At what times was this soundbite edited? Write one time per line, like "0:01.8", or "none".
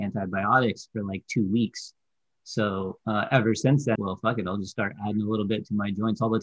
0:04.0